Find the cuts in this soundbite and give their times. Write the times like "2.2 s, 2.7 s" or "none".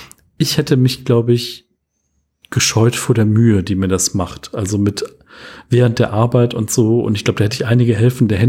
none